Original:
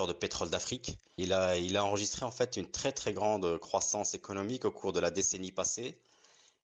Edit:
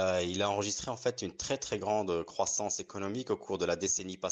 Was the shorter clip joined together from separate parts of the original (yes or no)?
no